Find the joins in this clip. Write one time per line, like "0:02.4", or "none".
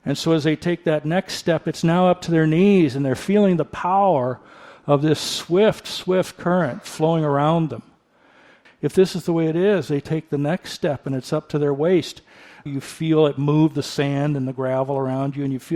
0:08.7
0:12.7